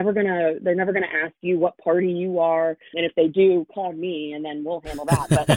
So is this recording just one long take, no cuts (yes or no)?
no